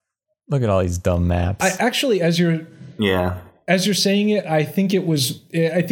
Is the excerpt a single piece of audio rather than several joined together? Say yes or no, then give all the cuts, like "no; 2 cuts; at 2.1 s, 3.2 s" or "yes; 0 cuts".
yes; 0 cuts